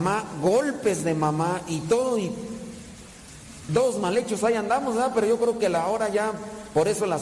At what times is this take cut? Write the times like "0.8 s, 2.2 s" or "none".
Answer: 3.7 s

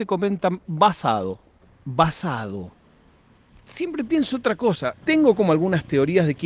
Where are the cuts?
1.7 s, 5.0 s

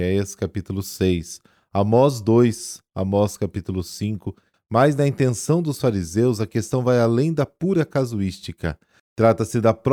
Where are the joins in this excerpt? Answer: 4.5 s

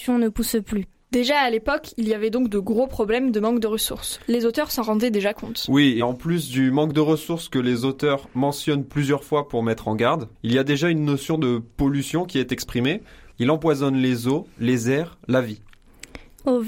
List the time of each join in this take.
10.3 s, 13.3 s

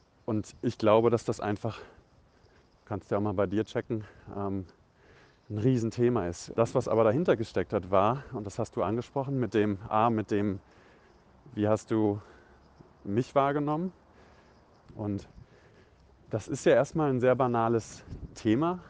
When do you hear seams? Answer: 6.5 s, 14.9 s

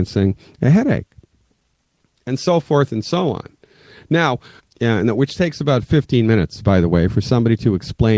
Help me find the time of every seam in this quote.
4.6 s

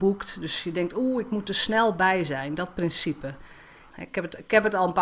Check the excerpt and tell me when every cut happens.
3.9 s

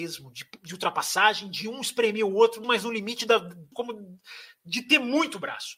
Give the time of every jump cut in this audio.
2.6 s, 3.7 s

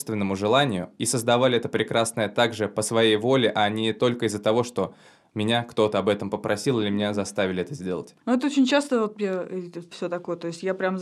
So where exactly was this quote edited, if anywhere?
8.2 s, 9.9 s

